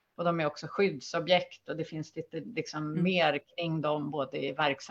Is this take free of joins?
yes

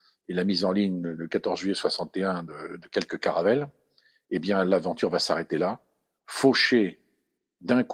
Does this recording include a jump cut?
no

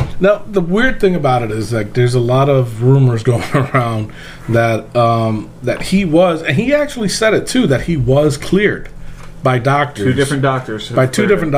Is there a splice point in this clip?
no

